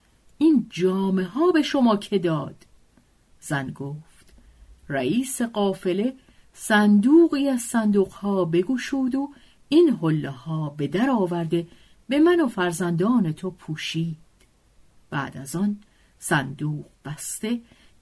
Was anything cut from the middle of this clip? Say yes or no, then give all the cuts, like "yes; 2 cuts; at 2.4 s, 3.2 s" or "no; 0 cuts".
no; 0 cuts